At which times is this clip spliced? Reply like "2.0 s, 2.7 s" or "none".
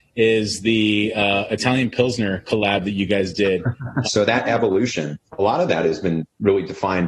4.0 s, 5.3 s